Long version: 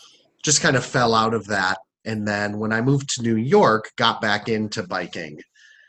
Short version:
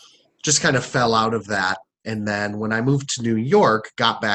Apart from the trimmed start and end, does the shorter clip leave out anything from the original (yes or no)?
no